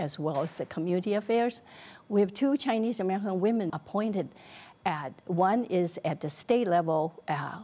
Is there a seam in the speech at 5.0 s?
no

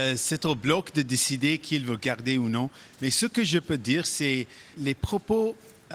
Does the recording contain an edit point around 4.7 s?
yes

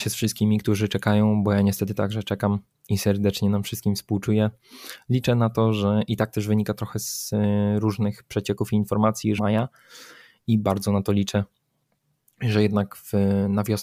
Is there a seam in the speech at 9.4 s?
yes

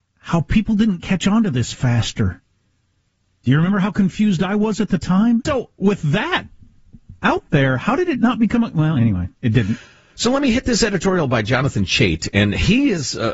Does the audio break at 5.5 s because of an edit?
yes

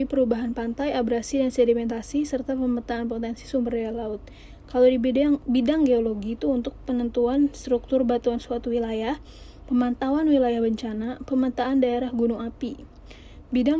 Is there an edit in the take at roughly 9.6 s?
no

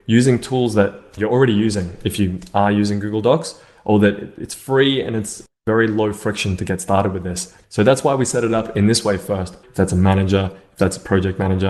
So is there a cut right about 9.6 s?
yes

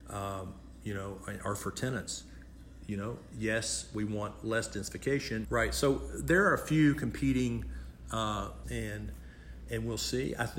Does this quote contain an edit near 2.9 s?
no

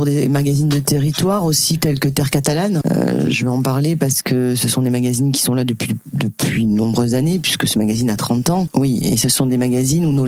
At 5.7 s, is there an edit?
no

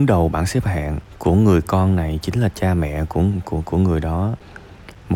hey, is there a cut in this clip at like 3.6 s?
yes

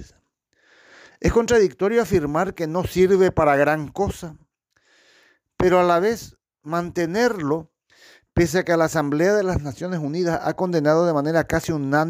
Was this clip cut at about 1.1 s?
no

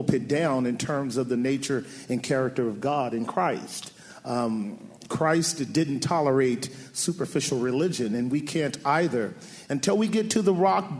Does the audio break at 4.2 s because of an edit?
no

